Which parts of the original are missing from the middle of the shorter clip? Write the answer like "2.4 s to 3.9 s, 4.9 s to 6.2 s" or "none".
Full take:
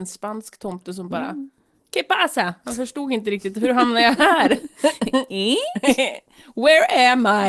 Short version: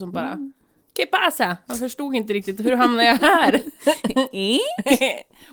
none